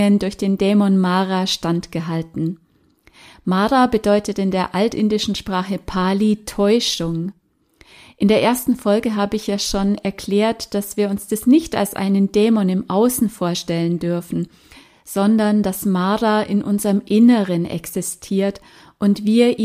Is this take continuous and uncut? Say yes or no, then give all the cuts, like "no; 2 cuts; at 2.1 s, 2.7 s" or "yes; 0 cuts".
yes; 0 cuts